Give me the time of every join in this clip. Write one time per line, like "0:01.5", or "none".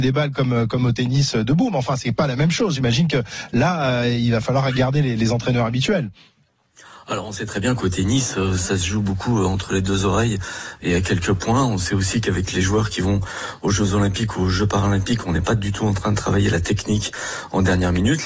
none